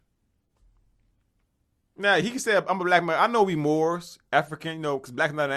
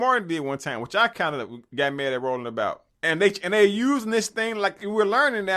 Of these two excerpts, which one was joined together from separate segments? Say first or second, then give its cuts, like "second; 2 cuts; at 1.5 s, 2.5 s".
second; 1 cut; at 2.9 s